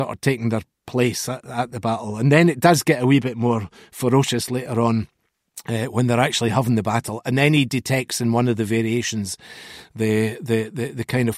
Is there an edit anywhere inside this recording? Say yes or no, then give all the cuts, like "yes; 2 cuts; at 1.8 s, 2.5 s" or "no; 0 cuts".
no; 0 cuts